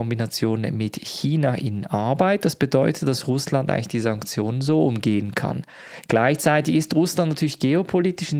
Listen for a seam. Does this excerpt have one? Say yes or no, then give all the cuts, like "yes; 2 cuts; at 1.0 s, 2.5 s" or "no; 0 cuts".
no; 0 cuts